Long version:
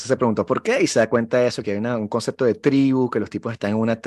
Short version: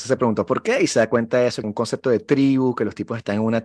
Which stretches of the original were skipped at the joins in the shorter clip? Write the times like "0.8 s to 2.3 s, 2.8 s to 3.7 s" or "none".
1.6 s to 2.0 s